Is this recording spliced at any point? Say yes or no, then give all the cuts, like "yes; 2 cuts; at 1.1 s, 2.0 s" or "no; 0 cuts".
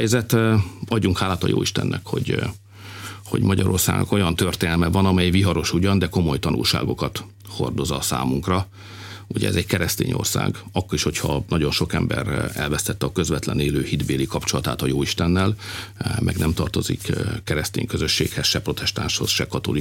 no; 0 cuts